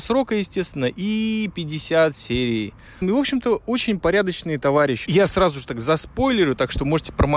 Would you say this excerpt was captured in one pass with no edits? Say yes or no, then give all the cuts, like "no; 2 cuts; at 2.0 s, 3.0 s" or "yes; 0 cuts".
no; 2 cuts; at 3.0 s, 5.1 s